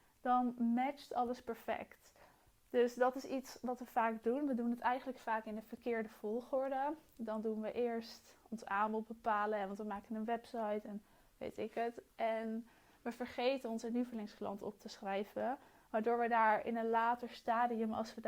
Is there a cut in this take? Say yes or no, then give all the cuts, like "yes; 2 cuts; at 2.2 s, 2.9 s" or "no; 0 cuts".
no; 0 cuts